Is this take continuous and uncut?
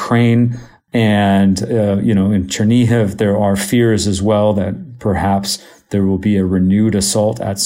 yes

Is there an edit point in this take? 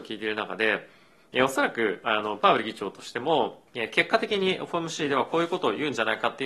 yes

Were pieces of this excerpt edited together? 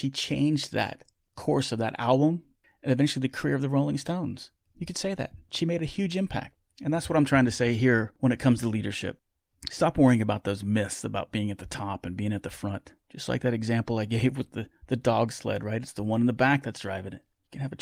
yes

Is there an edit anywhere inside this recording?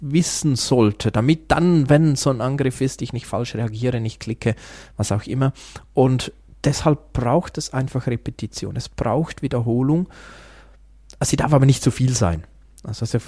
no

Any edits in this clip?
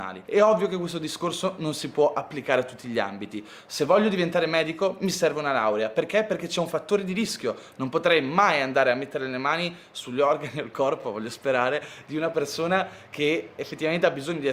no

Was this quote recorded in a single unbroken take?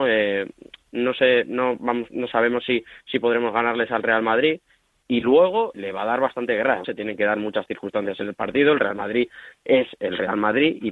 no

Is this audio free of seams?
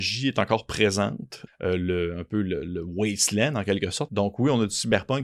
no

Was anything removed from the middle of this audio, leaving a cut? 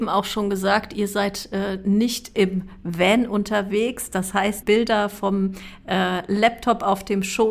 yes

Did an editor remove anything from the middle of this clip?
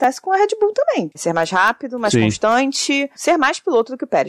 yes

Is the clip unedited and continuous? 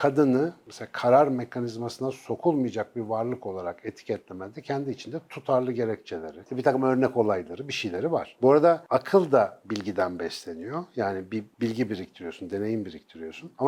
no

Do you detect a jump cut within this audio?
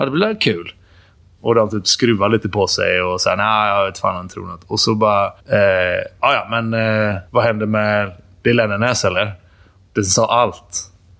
yes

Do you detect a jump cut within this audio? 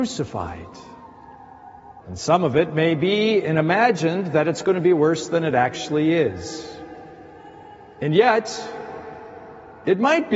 yes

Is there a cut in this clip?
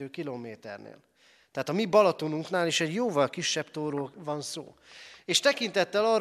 no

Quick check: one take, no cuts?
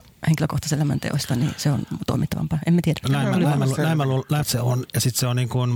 no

